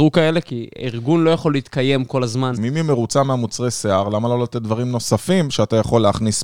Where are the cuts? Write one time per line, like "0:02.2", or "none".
0:02.6